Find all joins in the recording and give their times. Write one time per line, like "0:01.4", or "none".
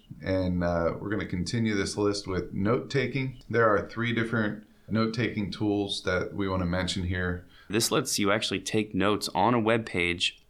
0:04.9
0:07.7